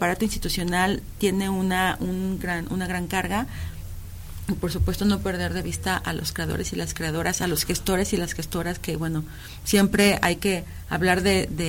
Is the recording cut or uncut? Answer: uncut